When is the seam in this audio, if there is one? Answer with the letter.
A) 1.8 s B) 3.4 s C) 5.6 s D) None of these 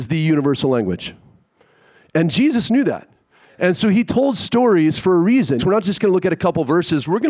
C